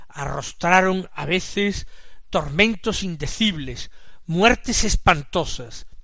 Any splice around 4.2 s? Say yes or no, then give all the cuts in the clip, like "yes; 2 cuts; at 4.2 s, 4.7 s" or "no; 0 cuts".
no; 0 cuts